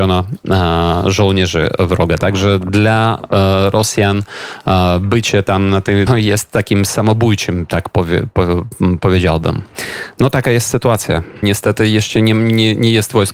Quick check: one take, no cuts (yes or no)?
no